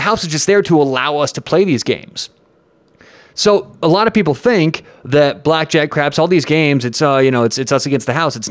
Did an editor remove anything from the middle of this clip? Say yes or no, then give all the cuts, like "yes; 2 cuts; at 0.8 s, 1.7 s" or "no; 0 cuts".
no; 0 cuts